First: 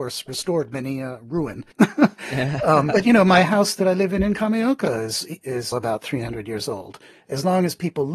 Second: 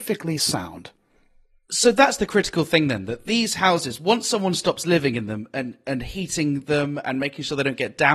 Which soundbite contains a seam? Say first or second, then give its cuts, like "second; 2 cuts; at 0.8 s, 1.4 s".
first; 2 cuts; at 1.7 s, 5.7 s